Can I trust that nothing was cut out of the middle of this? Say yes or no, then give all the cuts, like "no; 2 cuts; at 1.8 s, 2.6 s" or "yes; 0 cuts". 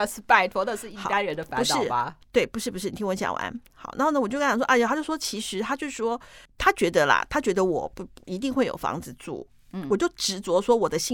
yes; 0 cuts